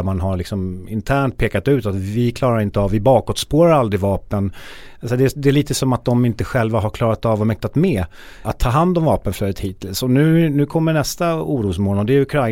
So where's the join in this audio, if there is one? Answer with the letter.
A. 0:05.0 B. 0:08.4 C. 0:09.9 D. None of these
B